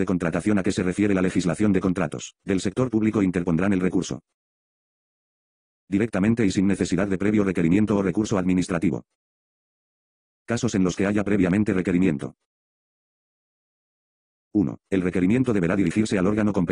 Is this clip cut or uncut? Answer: uncut